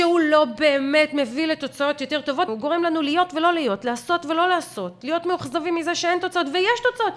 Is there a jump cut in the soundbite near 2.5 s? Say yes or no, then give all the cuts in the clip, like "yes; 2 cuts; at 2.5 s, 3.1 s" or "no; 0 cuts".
yes; 1 cut; at 2.5 s